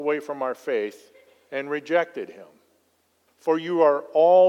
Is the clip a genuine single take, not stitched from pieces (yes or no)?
no